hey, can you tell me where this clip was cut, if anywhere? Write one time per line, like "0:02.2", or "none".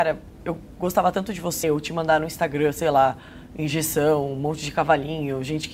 0:01.6